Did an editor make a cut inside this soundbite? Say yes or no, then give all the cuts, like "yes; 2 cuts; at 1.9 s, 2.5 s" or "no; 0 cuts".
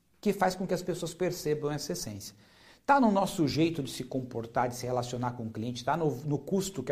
no; 0 cuts